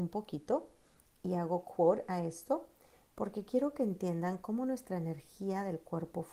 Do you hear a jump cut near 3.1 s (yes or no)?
yes